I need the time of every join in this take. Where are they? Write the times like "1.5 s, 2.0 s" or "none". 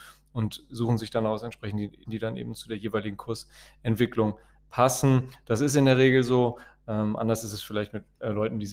2.0 s